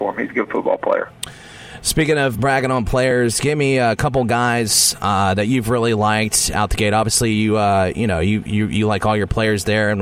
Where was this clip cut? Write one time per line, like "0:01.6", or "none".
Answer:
0:02.3